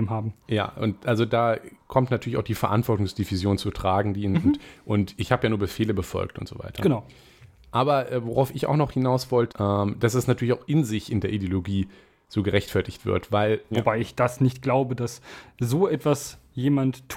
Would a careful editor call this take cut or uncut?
cut